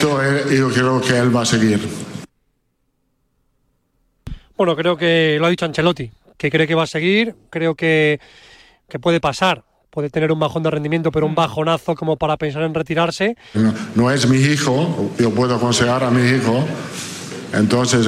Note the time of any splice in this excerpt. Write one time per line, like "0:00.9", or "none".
0:07.5
0:13.5